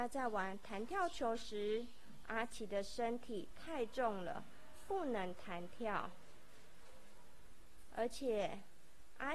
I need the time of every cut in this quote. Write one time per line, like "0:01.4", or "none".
none